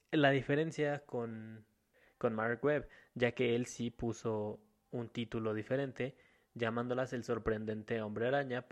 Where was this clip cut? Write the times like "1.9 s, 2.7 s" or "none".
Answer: none